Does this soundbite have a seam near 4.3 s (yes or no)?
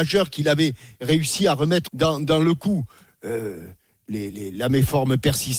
yes